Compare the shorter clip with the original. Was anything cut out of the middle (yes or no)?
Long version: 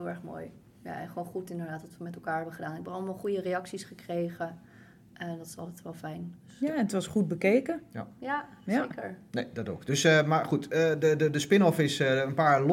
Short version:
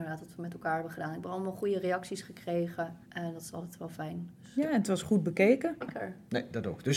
yes